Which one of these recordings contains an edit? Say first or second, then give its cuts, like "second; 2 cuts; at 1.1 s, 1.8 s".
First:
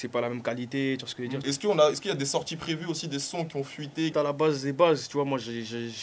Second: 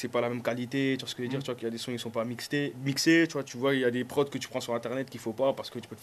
first; 2 cuts; at 1.4 s, 4.1 s